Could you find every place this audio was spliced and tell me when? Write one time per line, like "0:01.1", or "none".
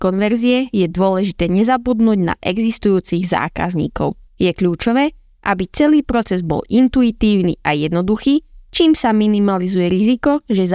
0:04.3